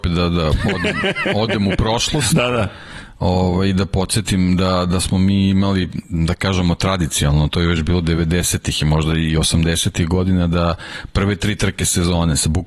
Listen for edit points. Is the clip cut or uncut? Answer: uncut